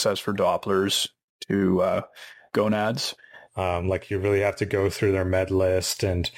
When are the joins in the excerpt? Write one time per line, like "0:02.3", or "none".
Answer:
0:03.5